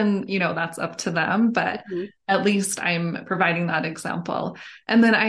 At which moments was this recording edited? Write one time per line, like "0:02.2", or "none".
none